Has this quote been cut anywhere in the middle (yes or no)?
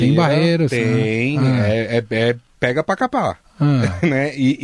no